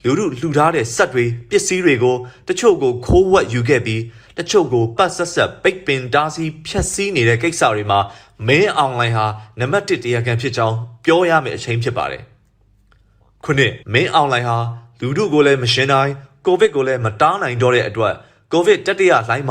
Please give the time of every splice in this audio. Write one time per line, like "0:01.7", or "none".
0:05.0
0:13.8